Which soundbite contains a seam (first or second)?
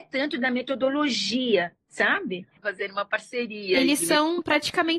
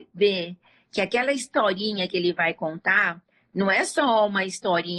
first